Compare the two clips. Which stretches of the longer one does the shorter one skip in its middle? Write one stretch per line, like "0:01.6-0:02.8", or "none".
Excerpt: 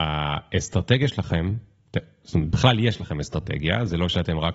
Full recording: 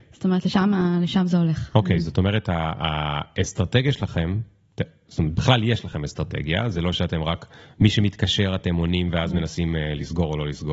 none